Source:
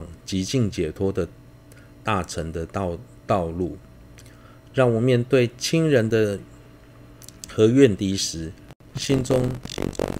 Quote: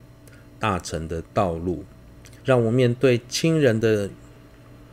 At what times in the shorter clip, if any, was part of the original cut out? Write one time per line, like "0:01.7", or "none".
0:01.2
0:02.4